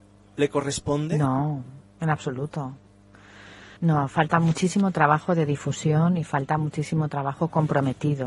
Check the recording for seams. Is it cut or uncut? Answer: cut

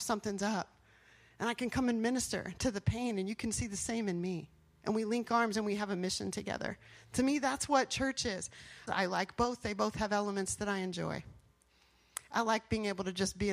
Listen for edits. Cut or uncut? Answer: cut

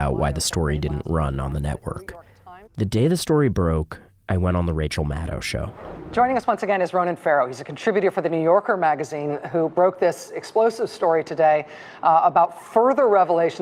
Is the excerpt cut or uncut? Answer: cut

